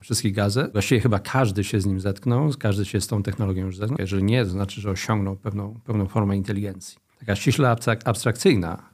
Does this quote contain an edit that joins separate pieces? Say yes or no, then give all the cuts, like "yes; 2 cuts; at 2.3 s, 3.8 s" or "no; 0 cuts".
yes; 2 cuts; at 4.0 s, 7.1 s